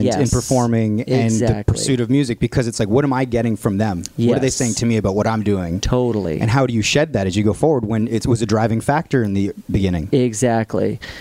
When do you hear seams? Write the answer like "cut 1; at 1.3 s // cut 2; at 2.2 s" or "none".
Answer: none